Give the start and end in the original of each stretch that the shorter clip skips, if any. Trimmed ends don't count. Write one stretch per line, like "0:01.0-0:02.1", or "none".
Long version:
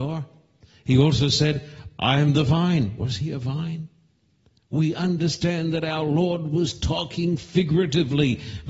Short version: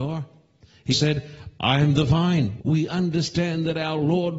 0:00.9-0:01.3
0:03.0-0:04.6